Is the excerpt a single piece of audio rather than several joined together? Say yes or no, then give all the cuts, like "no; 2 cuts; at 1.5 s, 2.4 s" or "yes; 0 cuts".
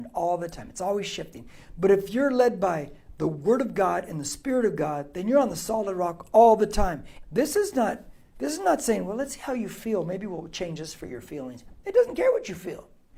no; 1 cut; at 7.2 s